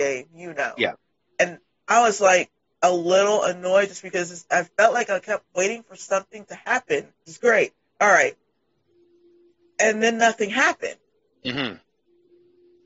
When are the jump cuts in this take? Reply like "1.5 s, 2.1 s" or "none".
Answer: 7.3 s

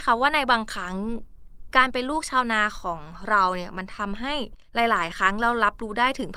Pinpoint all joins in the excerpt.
4.7 s

